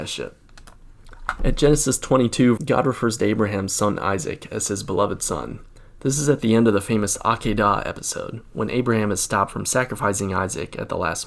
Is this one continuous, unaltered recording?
no; 1 cut; at 2.6 s

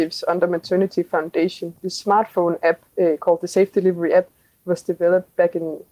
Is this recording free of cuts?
yes; 0 cuts

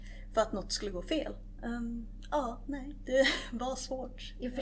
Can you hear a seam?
yes; 1 cut; at 1.6 s

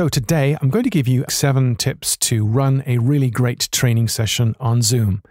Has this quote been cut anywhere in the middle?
yes; 1 cut; at 1.3 s

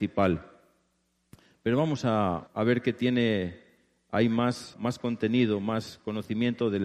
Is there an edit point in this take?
yes; 2 cuts; at 2.5 s, 4.7 s

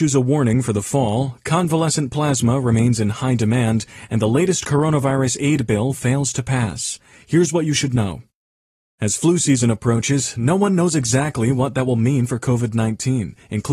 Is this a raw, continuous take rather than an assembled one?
yes; 0 cuts

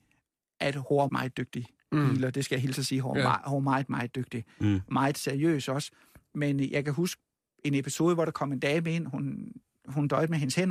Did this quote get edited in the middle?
yes; 1 cut; at 1.1 s

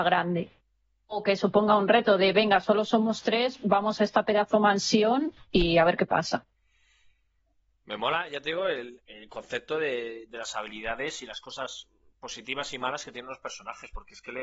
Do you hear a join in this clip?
yes; 1 cut; at 9.0 s

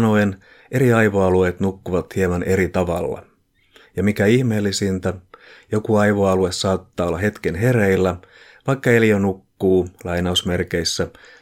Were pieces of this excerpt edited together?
no; 0 cuts

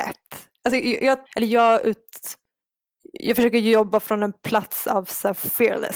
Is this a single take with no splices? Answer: no; 1 cut; at 1.3 s

